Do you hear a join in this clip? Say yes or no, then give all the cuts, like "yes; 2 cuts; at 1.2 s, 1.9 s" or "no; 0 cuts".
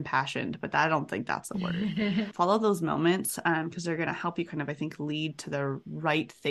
yes; 1 cut; at 2.3 s